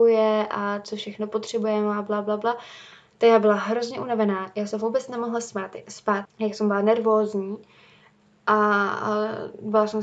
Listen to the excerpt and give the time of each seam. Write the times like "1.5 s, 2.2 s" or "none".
6.3 s